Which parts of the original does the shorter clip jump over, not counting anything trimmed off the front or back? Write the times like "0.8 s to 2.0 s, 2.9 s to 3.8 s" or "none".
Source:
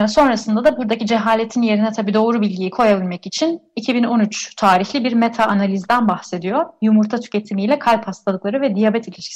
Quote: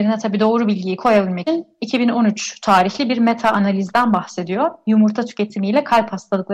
3.2 s to 3.4 s